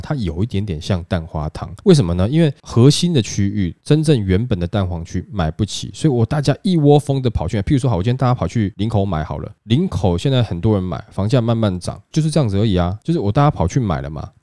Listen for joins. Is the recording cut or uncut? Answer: uncut